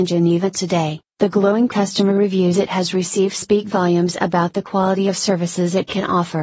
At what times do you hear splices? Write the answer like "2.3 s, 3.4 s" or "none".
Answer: 1.1 s